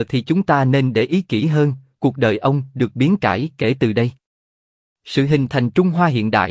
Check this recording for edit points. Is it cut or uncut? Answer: cut